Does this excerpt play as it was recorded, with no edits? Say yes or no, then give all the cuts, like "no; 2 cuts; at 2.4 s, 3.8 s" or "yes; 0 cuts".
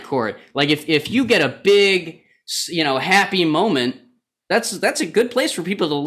yes; 0 cuts